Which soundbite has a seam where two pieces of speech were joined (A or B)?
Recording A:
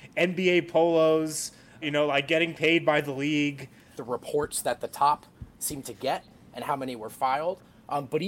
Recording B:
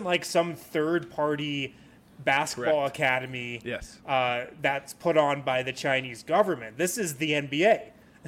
A